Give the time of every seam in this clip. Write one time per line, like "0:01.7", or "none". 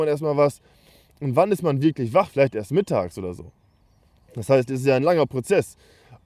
none